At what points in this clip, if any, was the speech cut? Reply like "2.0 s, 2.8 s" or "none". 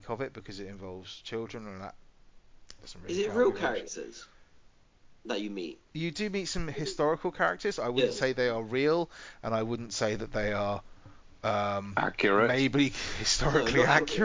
none

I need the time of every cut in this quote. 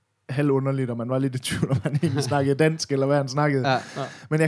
none

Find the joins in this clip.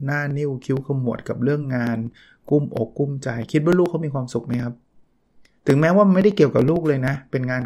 none

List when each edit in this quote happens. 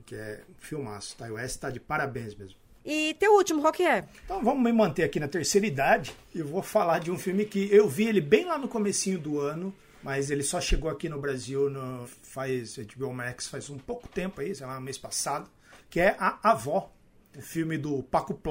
3.6 s, 12.0 s

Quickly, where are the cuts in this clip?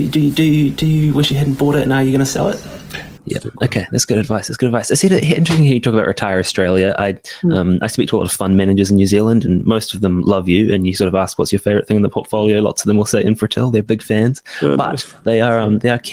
3.2 s

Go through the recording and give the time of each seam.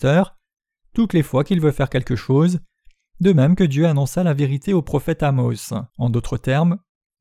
5.9 s

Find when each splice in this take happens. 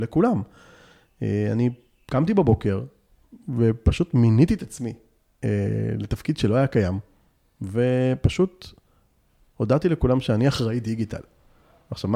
none

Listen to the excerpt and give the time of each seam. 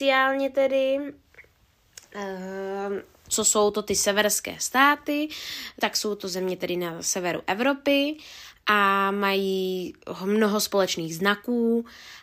3.3 s, 5.8 s

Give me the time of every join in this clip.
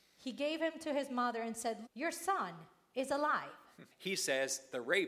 1.9 s, 3.9 s

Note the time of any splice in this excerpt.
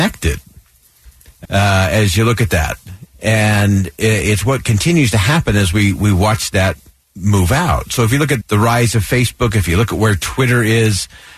1.4 s, 3.1 s, 8.4 s

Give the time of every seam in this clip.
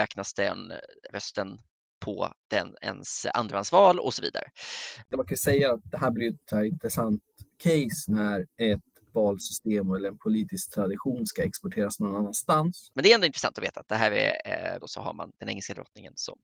5.1 s, 12.9 s, 14.8 s

